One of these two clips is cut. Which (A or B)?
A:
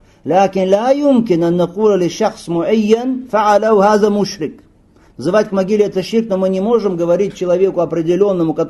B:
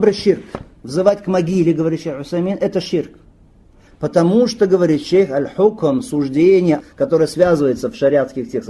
B